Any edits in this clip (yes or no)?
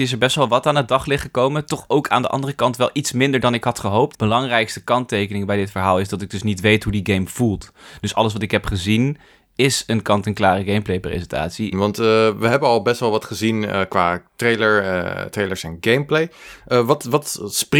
yes